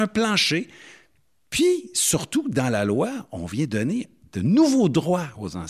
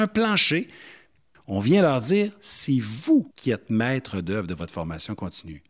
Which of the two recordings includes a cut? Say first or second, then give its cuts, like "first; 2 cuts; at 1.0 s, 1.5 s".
second; 2 cuts; at 1.3 s, 3.3 s